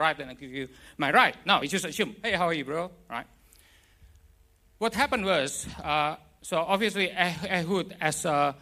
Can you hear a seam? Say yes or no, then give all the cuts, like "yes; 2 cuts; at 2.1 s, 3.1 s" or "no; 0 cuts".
no; 0 cuts